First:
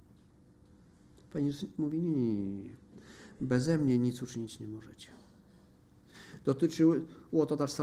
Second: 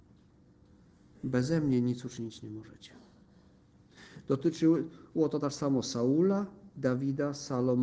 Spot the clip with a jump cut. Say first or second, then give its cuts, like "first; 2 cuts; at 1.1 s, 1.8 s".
second; 1 cut; at 1.1 s